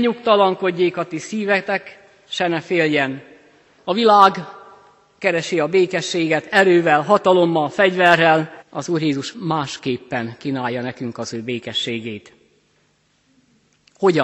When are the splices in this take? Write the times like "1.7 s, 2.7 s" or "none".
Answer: 3.8 s, 8.6 s